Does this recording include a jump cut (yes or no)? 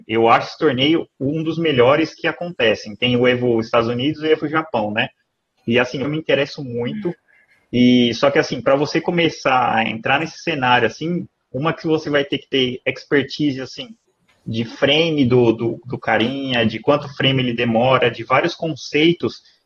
yes